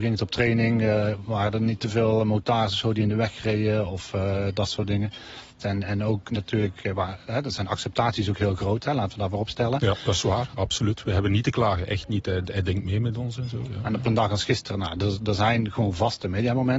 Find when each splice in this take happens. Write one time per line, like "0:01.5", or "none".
0:05.6